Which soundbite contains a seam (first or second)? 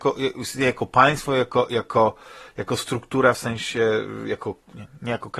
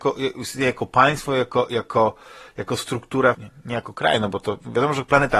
second